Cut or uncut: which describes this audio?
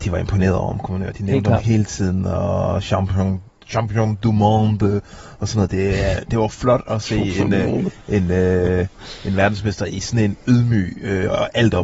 uncut